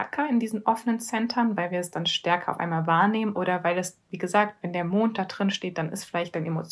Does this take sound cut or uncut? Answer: cut